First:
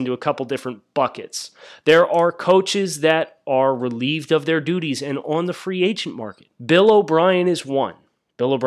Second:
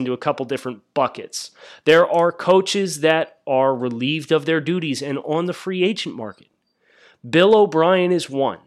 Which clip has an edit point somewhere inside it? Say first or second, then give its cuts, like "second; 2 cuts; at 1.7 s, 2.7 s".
first; 1 cut; at 6.5 s